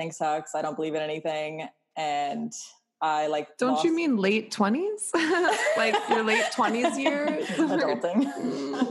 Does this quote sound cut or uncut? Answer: uncut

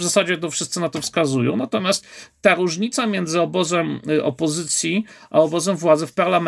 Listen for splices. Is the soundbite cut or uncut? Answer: uncut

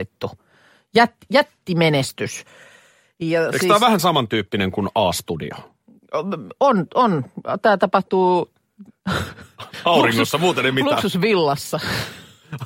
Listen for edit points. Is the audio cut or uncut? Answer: uncut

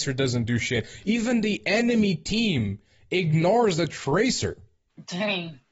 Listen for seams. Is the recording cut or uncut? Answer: uncut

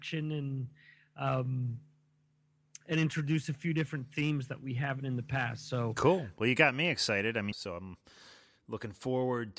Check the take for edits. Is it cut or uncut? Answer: cut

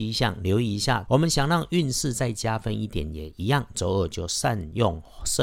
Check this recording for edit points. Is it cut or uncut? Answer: cut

